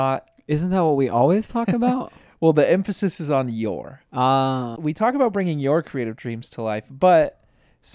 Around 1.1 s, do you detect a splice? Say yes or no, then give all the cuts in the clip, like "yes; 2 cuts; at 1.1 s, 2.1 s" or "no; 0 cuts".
no; 1 cut; at 4.8 s